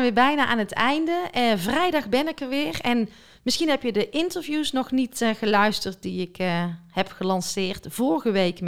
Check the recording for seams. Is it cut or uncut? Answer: uncut